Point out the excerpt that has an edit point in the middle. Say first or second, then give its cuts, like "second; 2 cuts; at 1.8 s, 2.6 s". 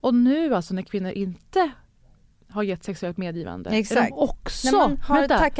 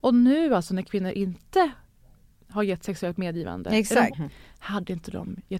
second; 1 cut; at 4.1 s